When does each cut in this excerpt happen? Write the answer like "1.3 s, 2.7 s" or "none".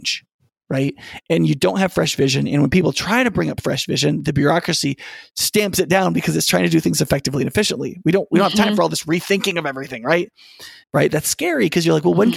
10.8 s